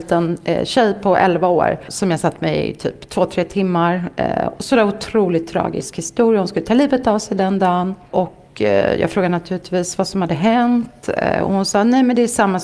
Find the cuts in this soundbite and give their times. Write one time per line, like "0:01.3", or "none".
none